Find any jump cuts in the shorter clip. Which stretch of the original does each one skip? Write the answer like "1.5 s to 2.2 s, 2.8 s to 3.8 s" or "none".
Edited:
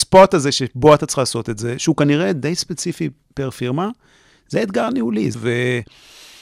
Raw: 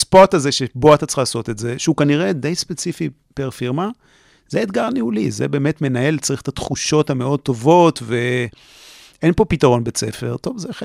5.3 s to 8.0 s